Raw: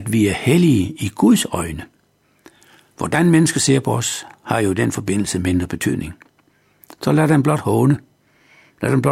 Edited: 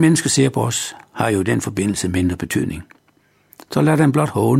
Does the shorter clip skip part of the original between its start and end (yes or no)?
no